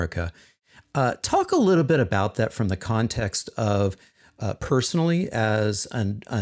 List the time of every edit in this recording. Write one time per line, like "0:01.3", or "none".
none